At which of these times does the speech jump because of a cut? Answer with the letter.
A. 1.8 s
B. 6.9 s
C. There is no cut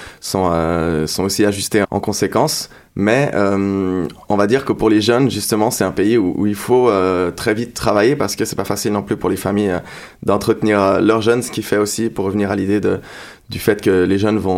A